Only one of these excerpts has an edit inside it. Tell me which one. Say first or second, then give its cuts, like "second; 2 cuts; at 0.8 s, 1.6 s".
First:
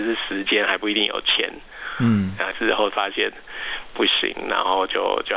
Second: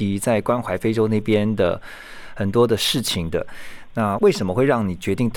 first; 1 cut; at 2.5 s